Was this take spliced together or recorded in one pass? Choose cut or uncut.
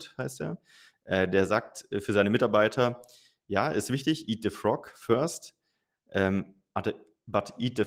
uncut